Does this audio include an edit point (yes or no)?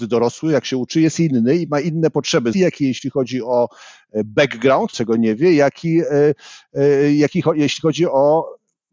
yes